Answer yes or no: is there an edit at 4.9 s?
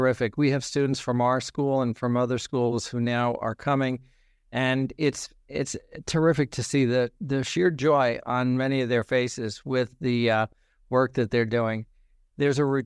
no